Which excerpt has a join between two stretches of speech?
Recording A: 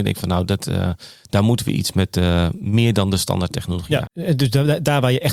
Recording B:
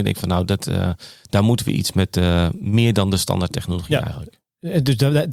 A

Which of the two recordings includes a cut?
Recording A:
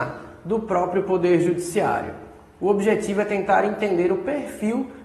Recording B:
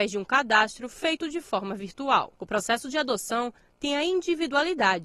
B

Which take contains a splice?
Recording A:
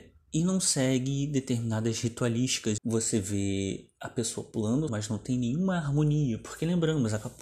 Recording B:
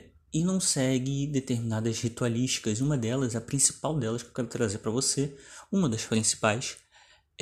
A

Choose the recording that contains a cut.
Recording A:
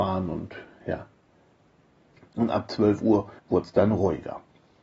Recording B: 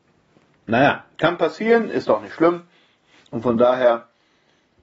A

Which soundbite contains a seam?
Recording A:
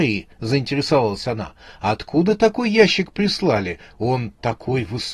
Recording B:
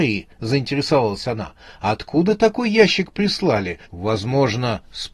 B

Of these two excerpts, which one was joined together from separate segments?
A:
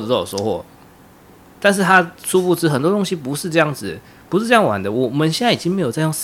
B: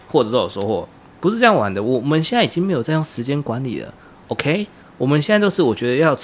B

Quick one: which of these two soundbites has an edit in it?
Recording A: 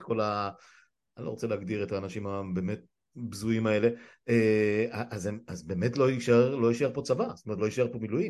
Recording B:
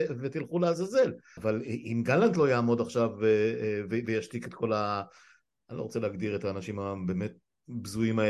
B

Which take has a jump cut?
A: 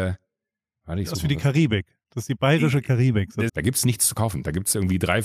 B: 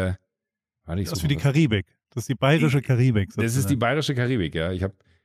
A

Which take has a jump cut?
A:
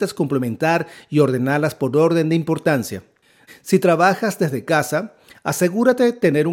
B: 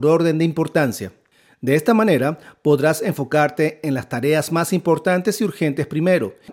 A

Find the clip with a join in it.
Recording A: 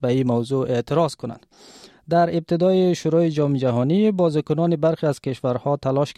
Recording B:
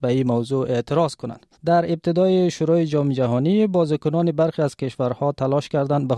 B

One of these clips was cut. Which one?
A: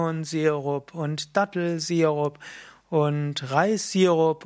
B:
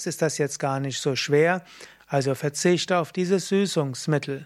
B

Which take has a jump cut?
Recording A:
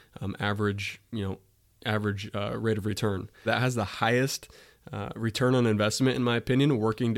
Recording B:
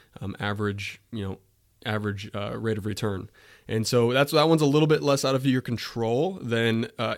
A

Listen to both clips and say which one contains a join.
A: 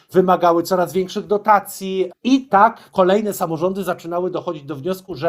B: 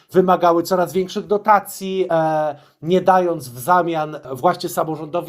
A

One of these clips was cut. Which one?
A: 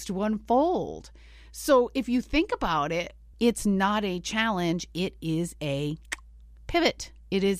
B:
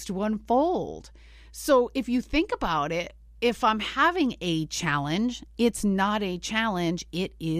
A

